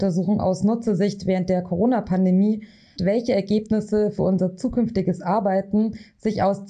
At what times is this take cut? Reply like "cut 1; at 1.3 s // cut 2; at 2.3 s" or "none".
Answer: cut 1; at 3.0 s